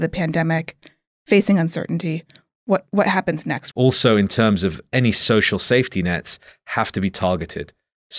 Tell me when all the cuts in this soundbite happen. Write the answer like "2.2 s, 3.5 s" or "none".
3.7 s